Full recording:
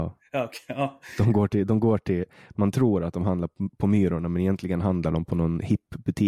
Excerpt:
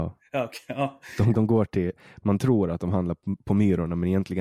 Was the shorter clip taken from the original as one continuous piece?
no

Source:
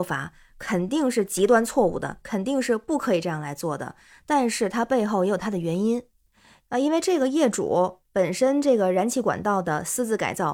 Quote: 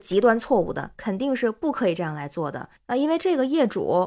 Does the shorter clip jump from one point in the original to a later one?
yes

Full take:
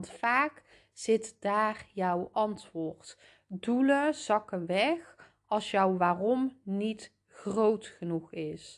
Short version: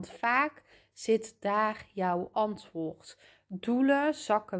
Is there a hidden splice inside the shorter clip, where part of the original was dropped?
no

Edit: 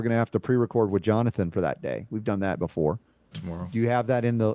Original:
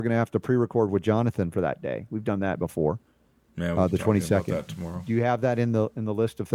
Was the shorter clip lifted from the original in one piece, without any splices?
no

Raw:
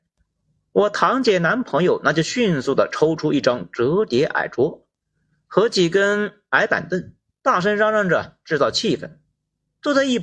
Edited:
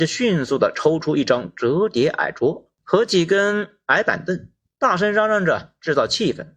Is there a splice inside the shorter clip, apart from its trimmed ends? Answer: yes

